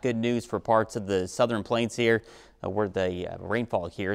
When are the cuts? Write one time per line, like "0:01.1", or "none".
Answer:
none